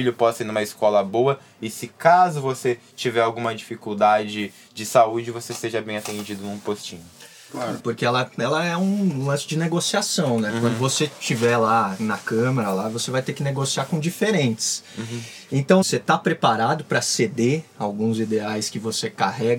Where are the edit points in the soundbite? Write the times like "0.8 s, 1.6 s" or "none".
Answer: 7.8 s, 15.8 s